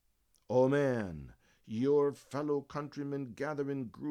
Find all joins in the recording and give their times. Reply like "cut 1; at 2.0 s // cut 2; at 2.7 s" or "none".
none

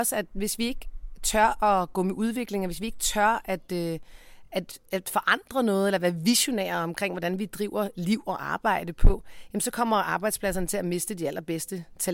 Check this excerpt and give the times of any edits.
none

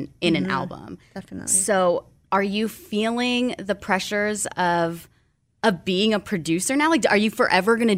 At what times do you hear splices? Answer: none

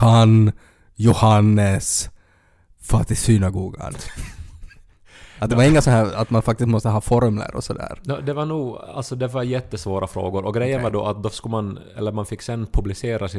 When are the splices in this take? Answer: none

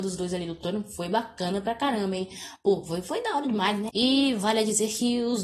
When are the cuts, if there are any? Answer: cut 1; at 3.9 s

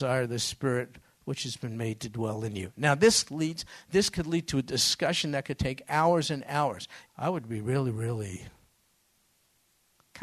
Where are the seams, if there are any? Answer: cut 1; at 7.1 s

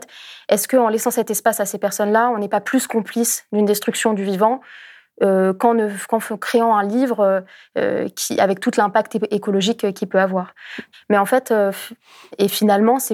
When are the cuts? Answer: cut 1; at 10.9 s

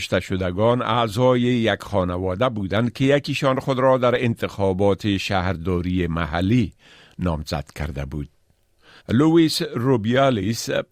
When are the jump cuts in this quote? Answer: cut 1; at 9.0 s

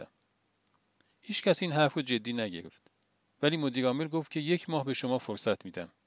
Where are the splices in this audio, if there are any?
none

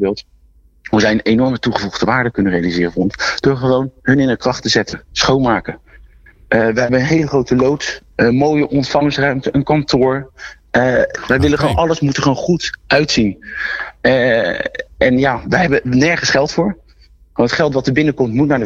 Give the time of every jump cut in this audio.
cut 1; at 8.1 s // cut 2; at 11.2 s

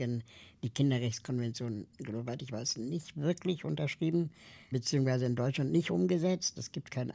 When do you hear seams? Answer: none

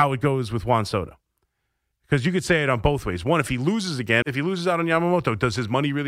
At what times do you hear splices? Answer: cut 1; at 4.2 s

